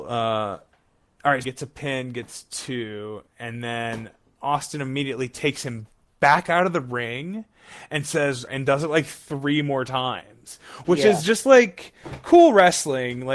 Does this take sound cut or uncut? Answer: cut